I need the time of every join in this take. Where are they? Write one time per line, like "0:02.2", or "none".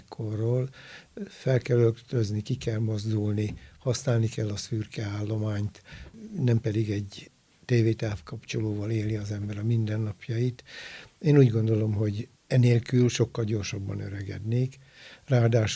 0:12.4